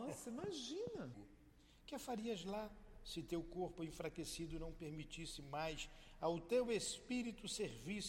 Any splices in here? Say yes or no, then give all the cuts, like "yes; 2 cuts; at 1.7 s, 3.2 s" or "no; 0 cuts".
yes; 1 cut; at 1.1 s